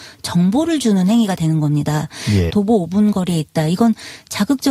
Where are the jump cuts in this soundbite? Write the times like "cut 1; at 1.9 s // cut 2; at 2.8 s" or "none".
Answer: cut 1; at 2.5 s